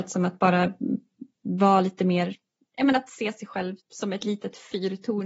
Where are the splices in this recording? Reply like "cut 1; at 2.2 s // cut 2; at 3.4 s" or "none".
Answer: cut 1; at 3.8 s